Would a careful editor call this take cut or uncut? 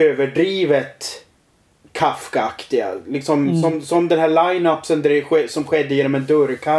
uncut